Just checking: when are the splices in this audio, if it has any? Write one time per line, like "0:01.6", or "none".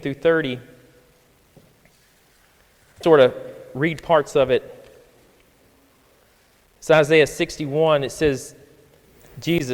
0:03.0